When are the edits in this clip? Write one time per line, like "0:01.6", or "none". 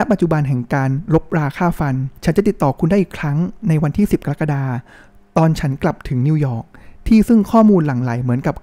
0:02.2